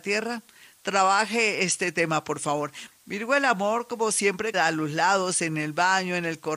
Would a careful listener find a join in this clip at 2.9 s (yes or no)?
yes